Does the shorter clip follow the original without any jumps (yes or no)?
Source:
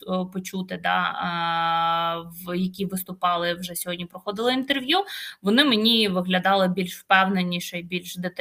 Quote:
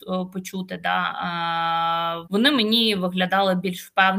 no